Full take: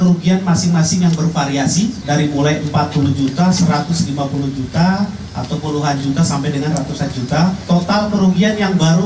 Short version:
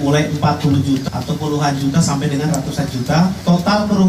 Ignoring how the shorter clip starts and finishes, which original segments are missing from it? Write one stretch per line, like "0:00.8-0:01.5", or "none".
0:03.4-0:05.3

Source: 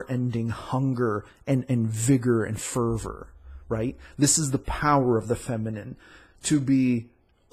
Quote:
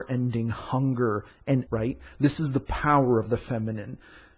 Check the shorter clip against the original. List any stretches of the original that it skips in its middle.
0:01.7-0:03.6

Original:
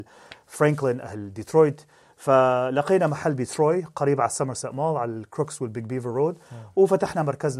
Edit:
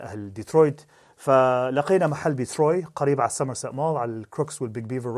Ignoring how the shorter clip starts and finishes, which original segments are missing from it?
none

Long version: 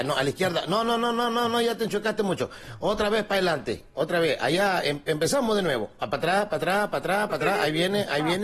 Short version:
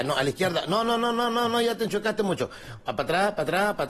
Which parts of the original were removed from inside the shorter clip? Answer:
0:02.8-0:05.9

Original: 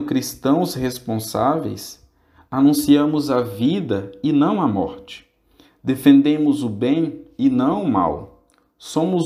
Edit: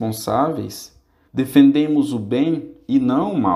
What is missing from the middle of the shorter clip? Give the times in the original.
0:02.3-0:05.7

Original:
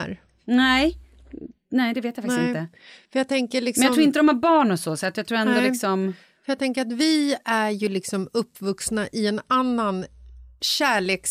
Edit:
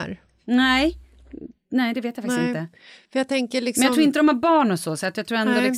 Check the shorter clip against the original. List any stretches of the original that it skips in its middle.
none

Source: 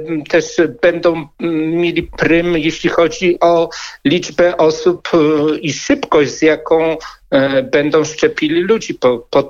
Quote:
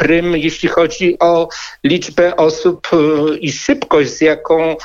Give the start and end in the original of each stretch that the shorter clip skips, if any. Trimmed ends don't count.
none

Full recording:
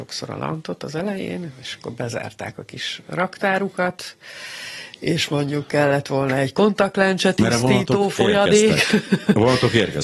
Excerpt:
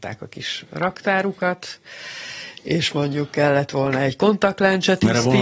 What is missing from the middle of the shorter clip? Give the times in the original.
none

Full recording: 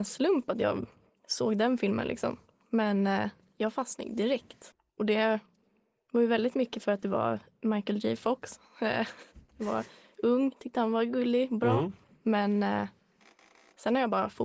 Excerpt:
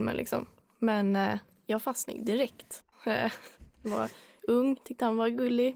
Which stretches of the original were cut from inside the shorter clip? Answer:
0:04.8-0:08.7

